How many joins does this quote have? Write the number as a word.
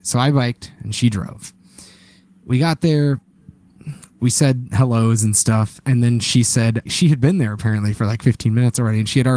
one